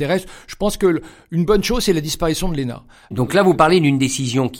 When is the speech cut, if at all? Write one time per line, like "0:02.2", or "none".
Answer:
none